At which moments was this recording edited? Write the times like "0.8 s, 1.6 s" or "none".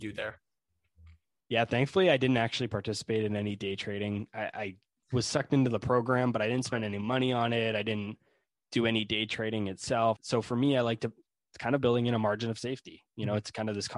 10.2 s

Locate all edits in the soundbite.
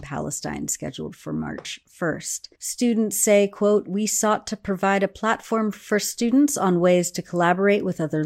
2.5 s

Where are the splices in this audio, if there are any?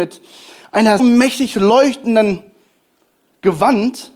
1.0 s

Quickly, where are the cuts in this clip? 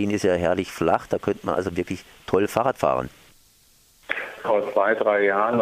4.4 s

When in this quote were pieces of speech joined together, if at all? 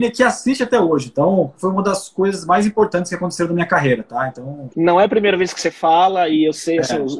none

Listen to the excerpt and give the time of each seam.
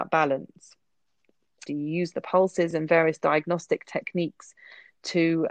1.7 s

